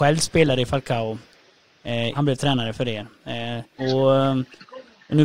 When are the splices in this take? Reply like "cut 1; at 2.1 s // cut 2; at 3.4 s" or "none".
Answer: cut 1; at 2.1 s // cut 2; at 3.8 s